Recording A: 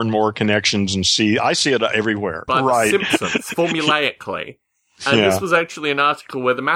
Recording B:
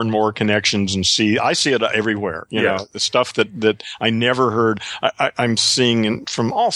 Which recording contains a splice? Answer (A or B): A